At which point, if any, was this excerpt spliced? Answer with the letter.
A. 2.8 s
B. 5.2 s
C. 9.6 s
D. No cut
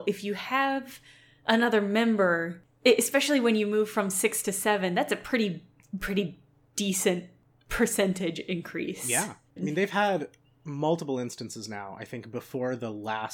C